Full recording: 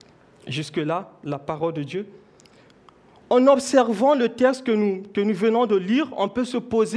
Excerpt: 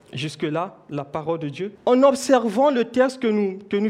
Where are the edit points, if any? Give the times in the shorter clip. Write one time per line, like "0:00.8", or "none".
0:01.8